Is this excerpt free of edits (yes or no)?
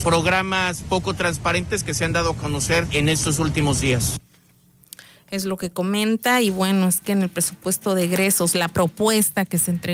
yes